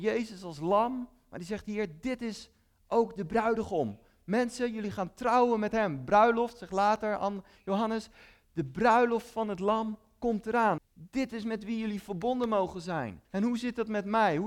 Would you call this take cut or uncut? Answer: cut